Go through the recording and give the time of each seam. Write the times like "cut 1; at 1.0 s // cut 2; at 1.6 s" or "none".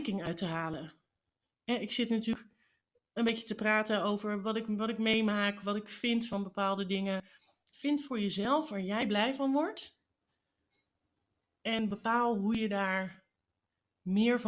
cut 1; at 7.7 s